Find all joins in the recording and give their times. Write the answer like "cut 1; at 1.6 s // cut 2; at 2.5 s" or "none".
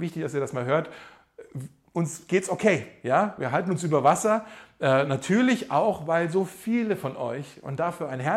none